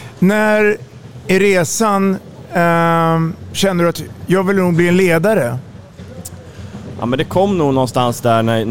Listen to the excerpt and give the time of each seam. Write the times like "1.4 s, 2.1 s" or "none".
none